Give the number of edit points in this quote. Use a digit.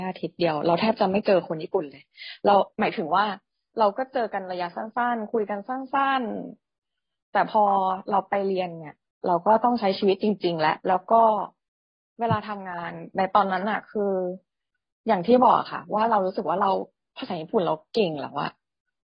1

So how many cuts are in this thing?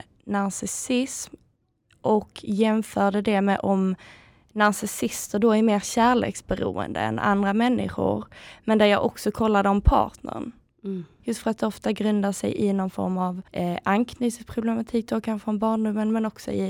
2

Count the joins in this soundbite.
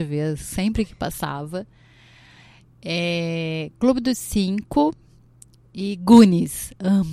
0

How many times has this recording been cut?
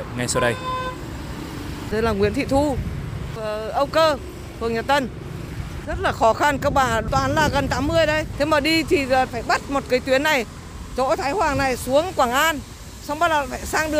1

